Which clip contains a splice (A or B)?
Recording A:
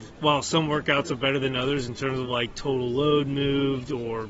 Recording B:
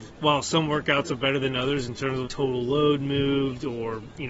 B